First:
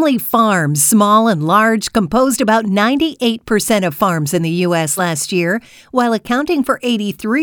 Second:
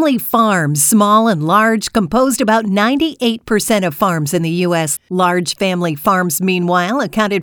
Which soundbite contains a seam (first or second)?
second